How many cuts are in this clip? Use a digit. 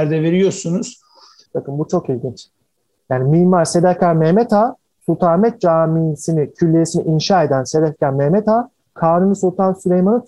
1